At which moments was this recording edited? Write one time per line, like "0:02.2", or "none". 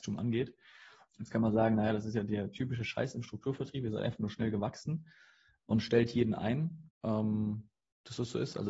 0:01.1
0:06.9